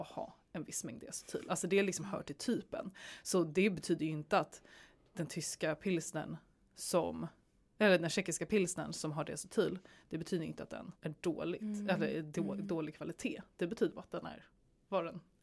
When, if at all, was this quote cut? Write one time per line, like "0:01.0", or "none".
0:10.9